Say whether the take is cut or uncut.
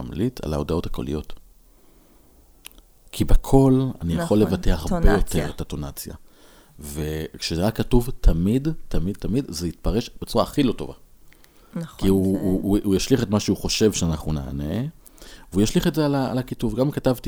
uncut